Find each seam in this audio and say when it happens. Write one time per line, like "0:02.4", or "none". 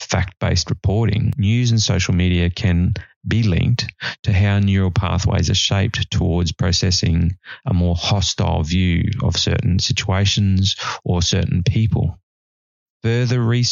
none

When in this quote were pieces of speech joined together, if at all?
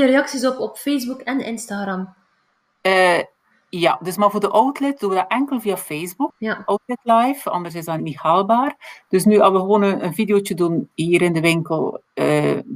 0:06.3
0:08.0

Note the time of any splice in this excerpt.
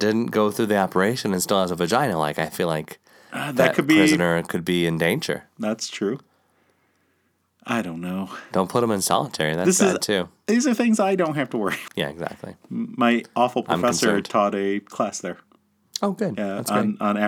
0:11.9

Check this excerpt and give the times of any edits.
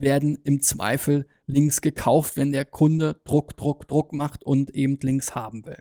none

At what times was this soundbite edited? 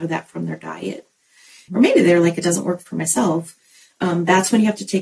0:01.7

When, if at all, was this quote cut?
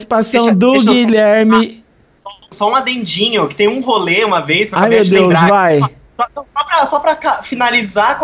0:02.5

